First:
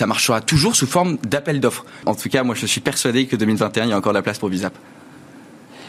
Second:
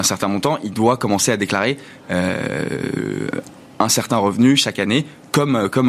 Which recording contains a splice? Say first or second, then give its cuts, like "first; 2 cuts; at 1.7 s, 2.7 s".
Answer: first; 1 cut; at 2.0 s